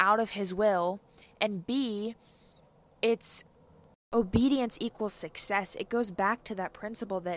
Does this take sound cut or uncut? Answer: uncut